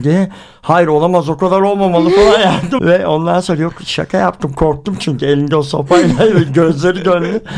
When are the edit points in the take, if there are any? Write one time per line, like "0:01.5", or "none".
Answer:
0:02.8